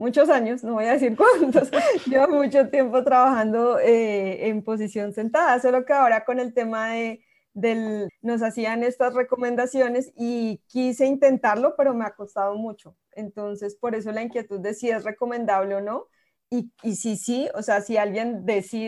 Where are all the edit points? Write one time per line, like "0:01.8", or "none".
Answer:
0:08.1